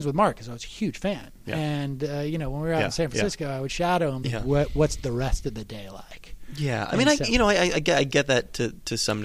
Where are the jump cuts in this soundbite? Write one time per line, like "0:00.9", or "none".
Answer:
0:04.2